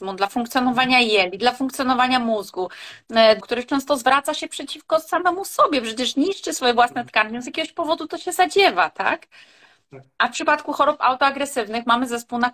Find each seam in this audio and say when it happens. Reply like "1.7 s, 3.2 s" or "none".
3.4 s